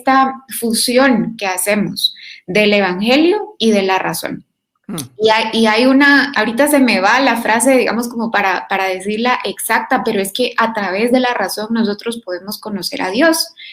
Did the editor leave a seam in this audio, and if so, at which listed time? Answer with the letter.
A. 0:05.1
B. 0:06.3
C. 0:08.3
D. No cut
B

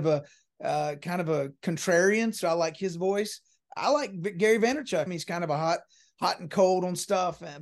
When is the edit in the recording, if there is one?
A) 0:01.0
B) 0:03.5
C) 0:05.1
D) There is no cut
C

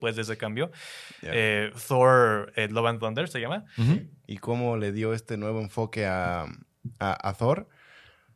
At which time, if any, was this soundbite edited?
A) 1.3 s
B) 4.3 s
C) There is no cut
B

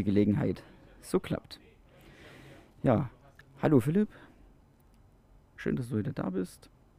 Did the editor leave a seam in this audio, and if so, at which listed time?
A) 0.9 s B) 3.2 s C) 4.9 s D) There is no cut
D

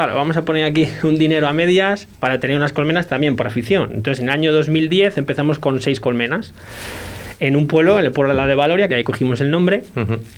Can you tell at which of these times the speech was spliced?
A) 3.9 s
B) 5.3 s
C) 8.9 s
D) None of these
C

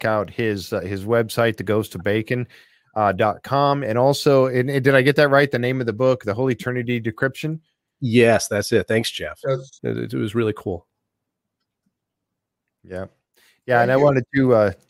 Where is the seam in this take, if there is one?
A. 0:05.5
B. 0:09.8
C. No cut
B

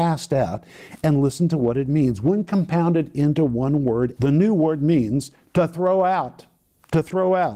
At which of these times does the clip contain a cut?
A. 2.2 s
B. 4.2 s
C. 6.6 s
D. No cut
B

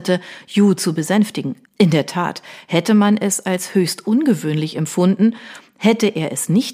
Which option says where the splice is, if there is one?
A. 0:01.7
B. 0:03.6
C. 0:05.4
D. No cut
A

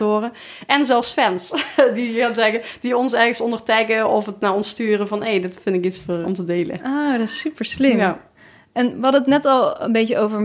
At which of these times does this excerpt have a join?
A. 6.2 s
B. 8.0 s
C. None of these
A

